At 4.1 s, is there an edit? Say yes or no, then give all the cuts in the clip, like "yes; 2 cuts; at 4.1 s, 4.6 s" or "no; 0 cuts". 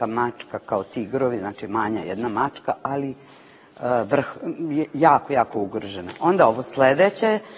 no; 0 cuts